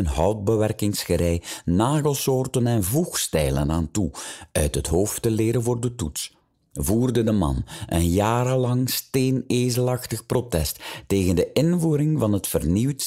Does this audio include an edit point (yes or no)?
no